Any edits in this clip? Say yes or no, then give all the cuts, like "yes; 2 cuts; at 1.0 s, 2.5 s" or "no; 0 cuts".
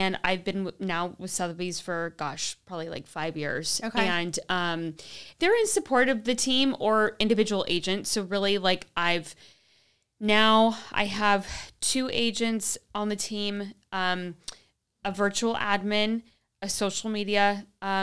yes; 1 cut; at 5.4 s